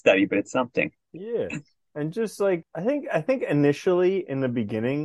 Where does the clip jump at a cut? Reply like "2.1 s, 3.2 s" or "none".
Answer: 1.0 s, 2.6 s